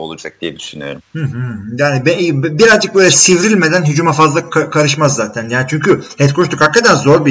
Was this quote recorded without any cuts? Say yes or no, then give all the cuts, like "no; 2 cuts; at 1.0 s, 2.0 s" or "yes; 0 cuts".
yes; 0 cuts